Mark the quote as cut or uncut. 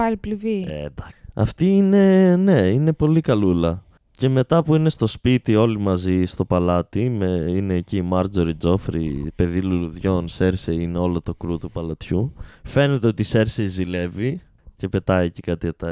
uncut